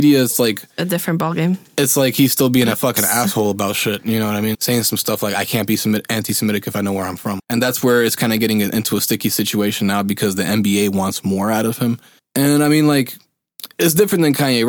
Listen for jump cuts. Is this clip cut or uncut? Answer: cut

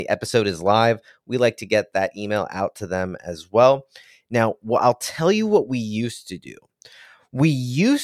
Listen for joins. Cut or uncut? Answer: uncut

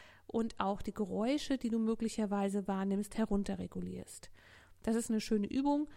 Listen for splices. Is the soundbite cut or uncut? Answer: uncut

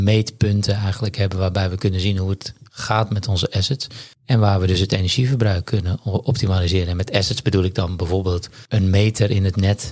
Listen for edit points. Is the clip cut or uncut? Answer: cut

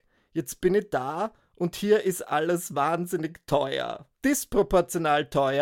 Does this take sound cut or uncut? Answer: cut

